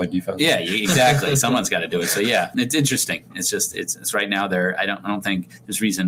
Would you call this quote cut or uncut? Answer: cut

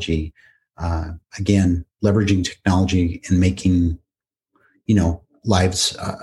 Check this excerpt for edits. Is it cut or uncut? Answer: uncut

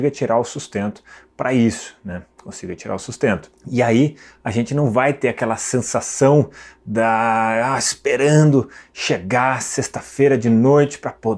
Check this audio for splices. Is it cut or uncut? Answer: cut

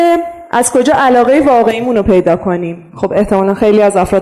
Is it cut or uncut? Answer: uncut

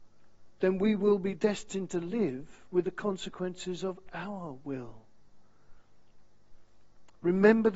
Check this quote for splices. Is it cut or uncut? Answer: uncut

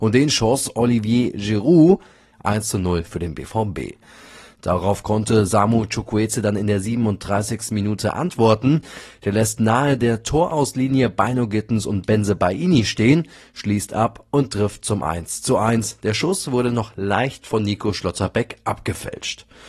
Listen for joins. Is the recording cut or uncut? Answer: cut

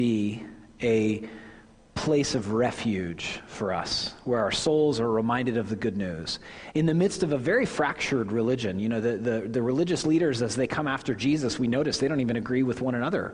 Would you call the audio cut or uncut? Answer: cut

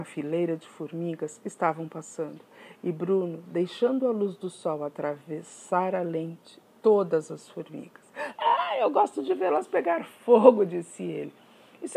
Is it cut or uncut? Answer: cut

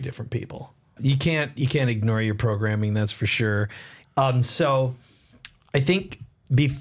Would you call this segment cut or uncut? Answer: cut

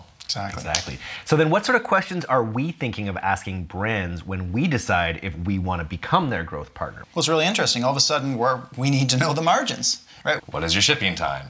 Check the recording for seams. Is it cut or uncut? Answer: cut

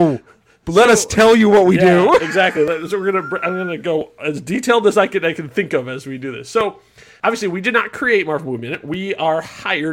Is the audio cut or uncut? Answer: uncut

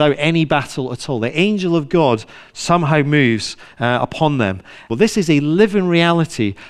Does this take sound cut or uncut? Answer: cut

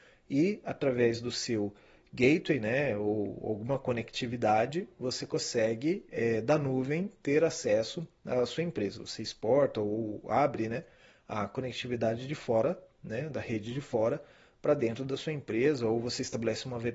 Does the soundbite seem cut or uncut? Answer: uncut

